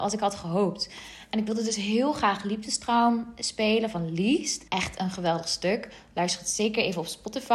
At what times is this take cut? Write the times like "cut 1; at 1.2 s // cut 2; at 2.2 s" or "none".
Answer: cut 1; at 4.7 s